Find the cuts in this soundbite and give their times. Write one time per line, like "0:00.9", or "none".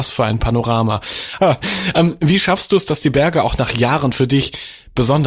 0:01.4